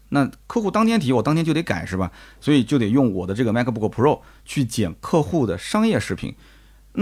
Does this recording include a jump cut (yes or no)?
no